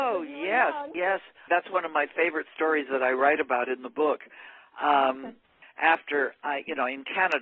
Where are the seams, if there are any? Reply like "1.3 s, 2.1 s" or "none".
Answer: 1.5 s, 5.6 s